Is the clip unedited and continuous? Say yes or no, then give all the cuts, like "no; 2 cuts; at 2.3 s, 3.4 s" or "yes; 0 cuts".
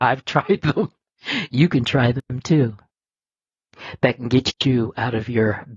yes; 0 cuts